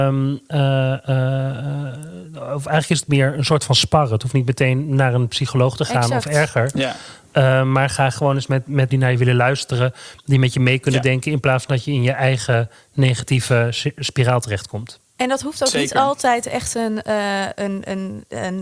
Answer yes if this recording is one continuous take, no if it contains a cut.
no